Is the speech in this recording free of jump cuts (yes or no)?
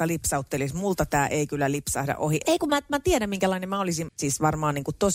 no